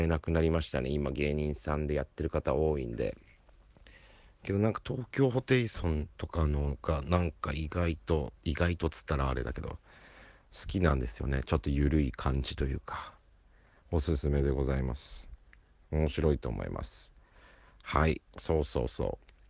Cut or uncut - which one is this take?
cut